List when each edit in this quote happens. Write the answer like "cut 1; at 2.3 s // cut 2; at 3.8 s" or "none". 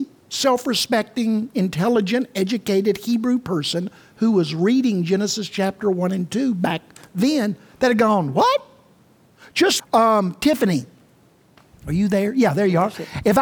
cut 1; at 9.8 s